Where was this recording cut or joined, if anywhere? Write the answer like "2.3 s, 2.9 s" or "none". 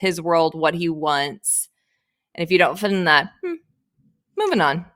none